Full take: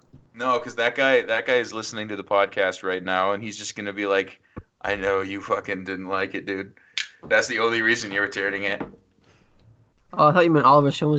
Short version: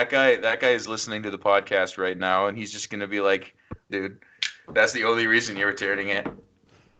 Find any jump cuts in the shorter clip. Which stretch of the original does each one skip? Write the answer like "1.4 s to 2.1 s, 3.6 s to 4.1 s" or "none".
4.8 s to 6.4 s